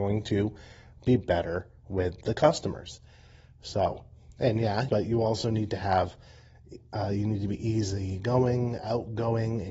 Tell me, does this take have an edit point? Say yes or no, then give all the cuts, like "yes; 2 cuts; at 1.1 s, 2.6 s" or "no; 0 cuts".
yes; 1 cut; at 4.9 s